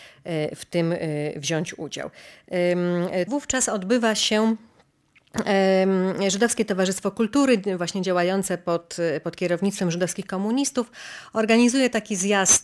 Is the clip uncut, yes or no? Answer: no